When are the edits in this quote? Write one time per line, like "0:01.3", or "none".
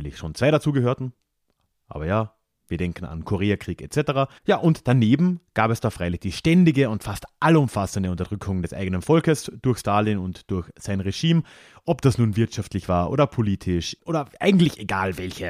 0:04.4
0:14.0